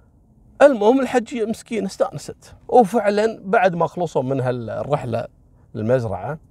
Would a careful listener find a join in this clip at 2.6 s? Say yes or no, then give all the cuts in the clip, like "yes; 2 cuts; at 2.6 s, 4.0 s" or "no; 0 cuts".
yes; 1 cut; at 2.6 s